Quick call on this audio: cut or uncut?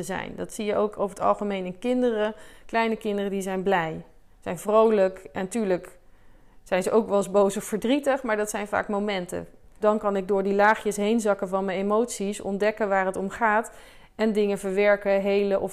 cut